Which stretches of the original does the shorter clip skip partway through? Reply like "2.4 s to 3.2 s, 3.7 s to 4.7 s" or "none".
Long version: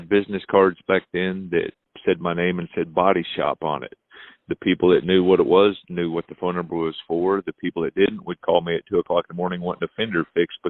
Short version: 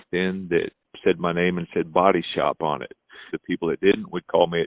4.3 s to 7.4 s